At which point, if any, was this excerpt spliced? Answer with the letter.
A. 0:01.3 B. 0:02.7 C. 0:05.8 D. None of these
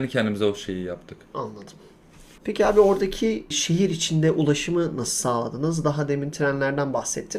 A